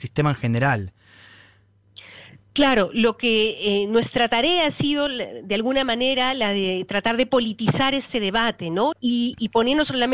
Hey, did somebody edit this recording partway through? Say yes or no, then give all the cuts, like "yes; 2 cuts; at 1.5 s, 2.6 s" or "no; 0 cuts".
yes; 1 cut; at 8.9 s